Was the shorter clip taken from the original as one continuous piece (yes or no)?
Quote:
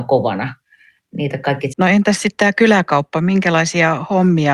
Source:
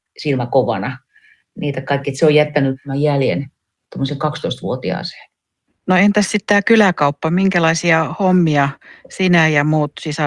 no